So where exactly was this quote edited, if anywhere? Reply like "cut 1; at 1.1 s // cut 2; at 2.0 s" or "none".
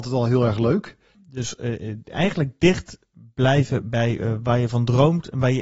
cut 1; at 1.1 s